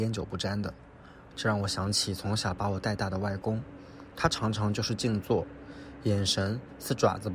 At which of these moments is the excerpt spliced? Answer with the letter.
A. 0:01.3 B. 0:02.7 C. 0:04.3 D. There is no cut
A